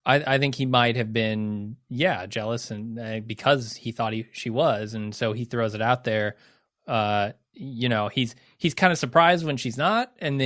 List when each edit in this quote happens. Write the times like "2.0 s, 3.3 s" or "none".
none